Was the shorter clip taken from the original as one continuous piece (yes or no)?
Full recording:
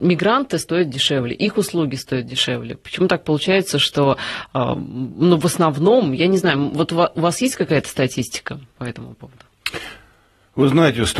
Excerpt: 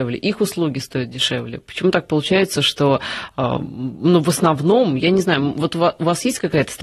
yes